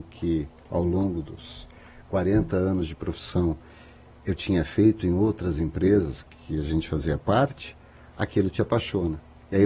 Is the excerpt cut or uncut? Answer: uncut